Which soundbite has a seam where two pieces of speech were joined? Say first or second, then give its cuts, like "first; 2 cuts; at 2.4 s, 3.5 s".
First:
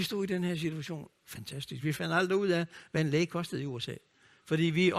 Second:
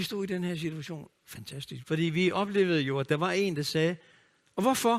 second; 1 cut; at 1.8 s